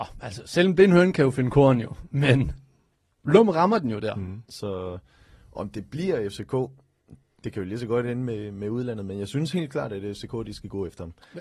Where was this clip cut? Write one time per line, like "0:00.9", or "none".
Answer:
0:04.5